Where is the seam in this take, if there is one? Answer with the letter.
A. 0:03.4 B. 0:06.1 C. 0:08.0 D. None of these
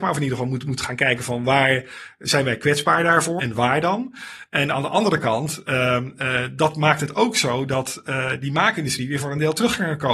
A